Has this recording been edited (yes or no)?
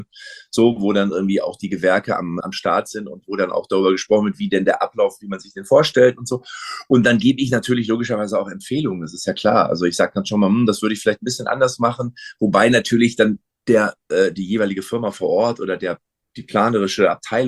yes